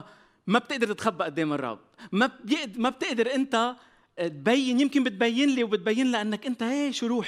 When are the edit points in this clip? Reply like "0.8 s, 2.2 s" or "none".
4.2 s